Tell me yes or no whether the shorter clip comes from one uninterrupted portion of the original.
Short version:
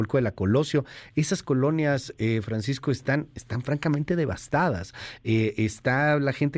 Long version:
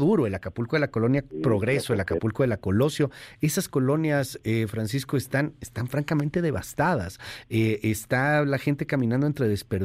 yes